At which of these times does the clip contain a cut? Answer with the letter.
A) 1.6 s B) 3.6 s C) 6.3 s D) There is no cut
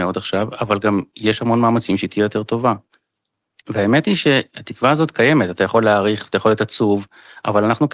B